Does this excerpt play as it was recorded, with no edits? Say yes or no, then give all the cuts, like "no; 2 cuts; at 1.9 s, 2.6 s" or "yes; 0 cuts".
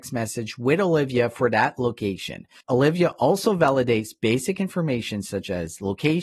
no; 1 cut; at 2.6 s